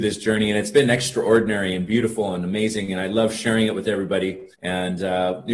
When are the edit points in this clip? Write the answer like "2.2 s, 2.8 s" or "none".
4.5 s